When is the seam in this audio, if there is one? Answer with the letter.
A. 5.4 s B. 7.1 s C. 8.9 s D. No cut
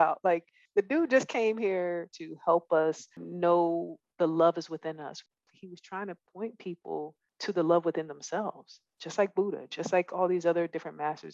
D